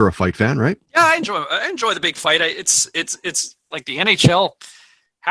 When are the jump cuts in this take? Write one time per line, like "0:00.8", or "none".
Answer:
0:03.7